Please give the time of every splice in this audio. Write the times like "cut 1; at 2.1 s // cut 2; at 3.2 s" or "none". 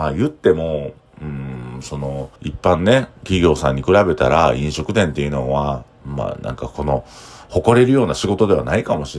cut 1; at 2.4 s